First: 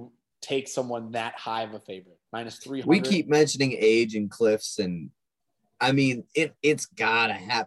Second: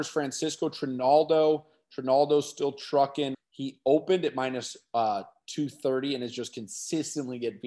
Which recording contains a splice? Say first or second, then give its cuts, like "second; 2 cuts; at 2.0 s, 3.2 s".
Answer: second; 1 cut; at 3.3 s